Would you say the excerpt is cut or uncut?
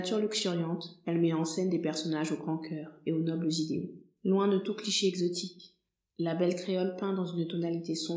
uncut